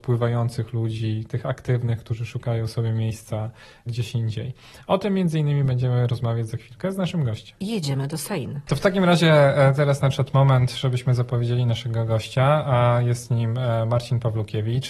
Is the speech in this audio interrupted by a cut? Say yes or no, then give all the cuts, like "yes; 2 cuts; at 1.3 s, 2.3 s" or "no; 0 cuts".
no; 0 cuts